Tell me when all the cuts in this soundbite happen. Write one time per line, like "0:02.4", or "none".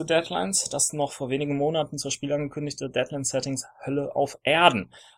none